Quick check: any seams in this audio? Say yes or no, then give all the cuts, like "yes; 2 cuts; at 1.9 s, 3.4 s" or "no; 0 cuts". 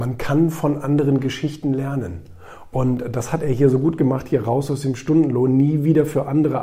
no; 0 cuts